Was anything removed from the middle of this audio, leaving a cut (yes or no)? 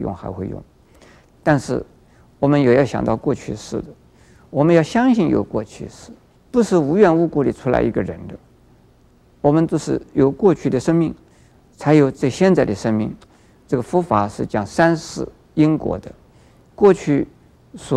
yes